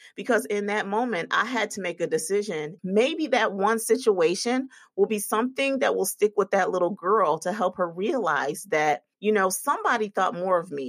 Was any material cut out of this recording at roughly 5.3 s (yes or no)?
no